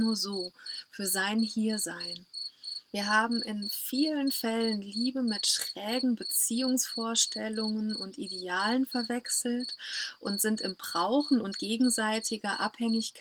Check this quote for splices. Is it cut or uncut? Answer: cut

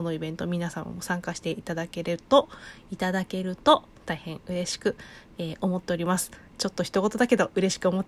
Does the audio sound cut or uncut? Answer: uncut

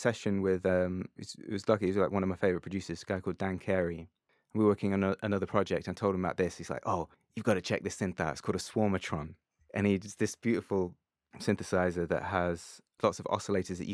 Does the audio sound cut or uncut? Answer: cut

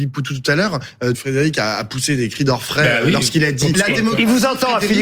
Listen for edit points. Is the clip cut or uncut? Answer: cut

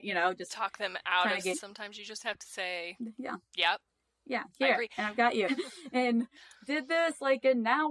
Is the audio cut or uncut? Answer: cut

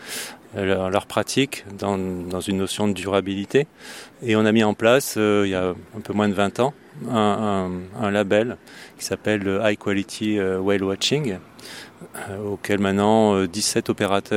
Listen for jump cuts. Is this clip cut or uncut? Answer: cut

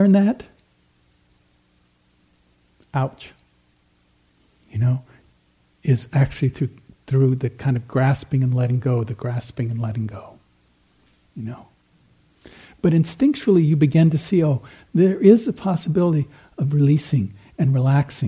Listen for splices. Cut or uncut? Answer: uncut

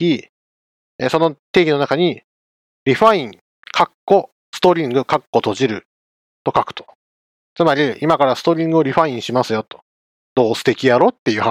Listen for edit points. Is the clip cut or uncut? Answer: cut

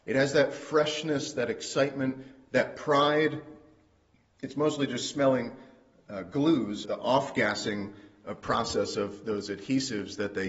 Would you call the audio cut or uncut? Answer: cut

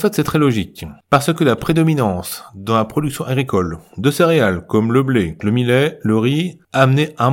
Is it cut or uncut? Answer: cut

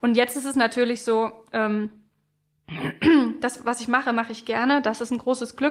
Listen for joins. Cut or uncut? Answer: uncut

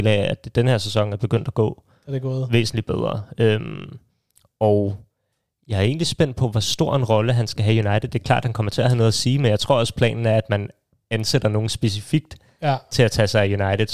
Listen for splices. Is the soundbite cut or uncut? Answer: uncut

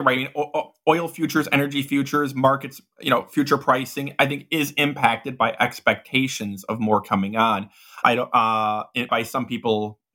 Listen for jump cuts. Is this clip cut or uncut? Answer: cut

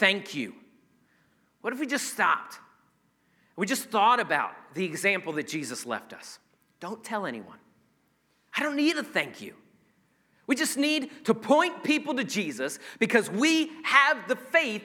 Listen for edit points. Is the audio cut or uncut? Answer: uncut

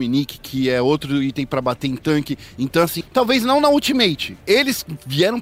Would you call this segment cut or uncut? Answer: cut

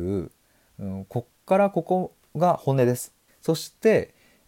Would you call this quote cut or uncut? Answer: cut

